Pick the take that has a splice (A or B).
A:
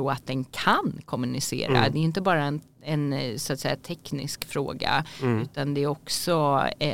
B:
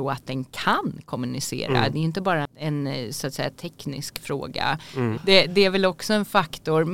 B